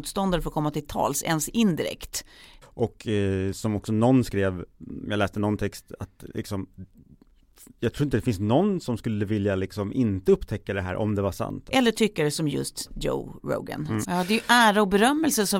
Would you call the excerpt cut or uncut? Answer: cut